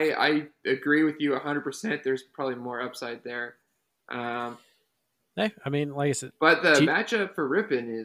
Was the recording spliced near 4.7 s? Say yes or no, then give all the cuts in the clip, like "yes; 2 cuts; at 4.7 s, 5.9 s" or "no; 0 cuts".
no; 0 cuts